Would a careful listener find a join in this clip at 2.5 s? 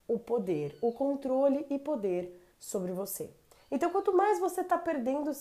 yes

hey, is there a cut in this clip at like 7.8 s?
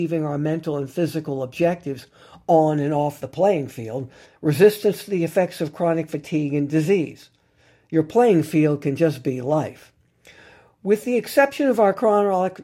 no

